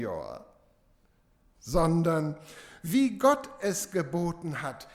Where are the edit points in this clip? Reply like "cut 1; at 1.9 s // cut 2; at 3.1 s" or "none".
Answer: none